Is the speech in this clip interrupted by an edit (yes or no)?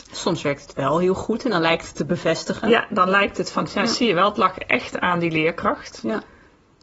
no